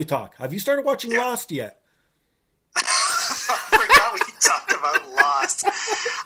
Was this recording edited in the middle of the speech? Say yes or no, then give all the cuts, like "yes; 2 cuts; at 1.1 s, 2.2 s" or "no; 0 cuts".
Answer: no; 0 cuts